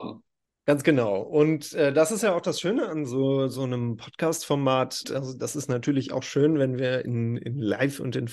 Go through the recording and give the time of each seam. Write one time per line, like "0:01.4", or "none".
0:05.0